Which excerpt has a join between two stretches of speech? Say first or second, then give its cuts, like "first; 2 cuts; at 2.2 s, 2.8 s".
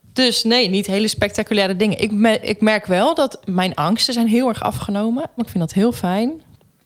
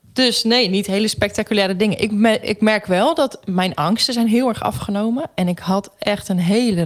first; 1 cut; at 5.4 s